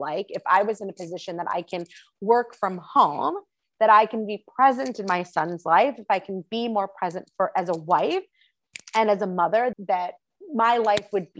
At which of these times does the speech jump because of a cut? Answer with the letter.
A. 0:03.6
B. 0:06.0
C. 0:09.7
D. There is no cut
C